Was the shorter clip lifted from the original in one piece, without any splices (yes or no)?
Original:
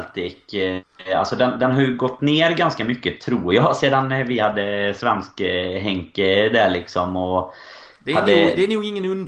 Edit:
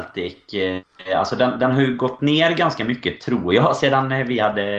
yes